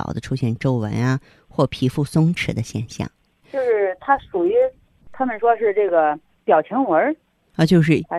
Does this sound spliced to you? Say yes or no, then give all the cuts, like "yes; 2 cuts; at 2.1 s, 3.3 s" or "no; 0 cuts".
yes; 1 cut; at 3.4 s